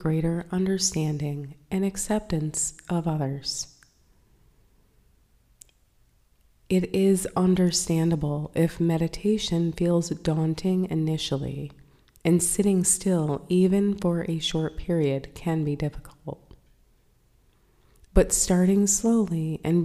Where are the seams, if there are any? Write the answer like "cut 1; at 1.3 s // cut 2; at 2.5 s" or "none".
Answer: none